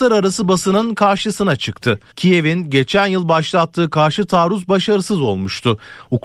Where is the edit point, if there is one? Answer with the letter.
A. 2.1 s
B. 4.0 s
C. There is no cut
A